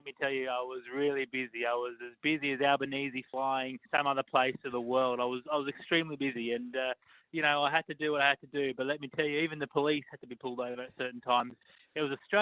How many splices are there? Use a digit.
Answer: 1